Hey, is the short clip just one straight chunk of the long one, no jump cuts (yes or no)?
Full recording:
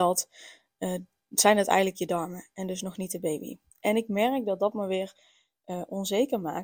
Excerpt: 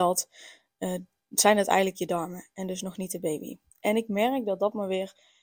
yes